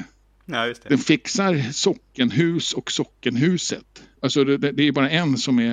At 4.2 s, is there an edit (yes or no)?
yes